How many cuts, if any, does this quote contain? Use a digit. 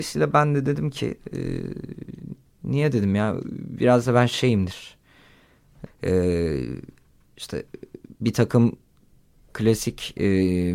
2